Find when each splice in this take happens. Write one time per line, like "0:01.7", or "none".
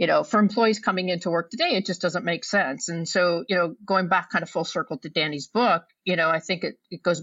none